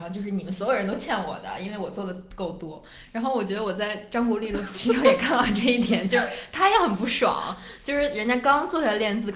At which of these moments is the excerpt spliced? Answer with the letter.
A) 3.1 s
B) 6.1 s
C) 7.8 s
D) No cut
A